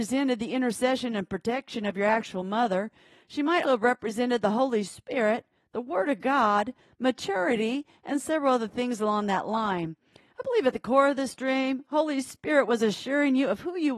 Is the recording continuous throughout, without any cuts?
no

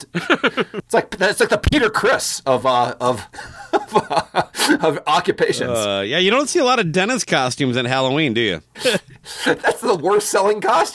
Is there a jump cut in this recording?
yes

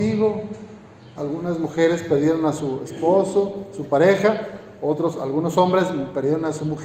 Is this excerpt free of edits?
no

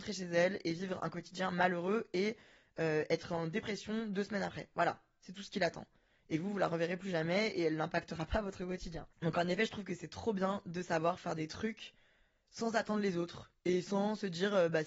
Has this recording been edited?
no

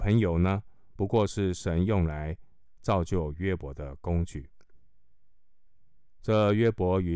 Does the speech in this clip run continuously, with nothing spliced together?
no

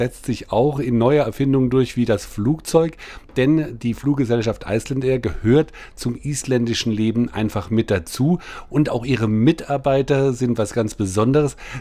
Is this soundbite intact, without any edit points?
yes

